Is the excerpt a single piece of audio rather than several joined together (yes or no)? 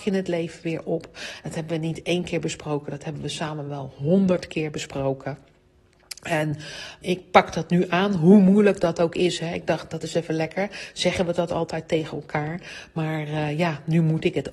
no